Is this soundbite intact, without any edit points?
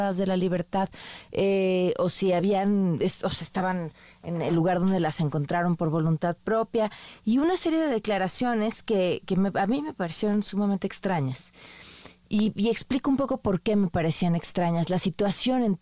yes; 0 cuts

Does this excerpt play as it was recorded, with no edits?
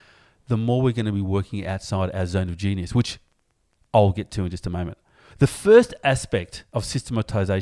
no; 1 cut; at 5.3 s

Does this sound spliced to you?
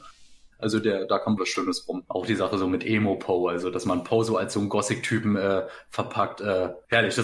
yes; 1 cut; at 1.4 s

